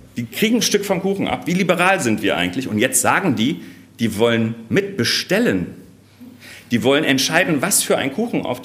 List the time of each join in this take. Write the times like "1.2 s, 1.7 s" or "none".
none